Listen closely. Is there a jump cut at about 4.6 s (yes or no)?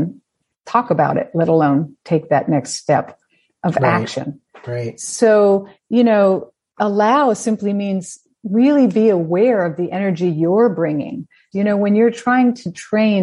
no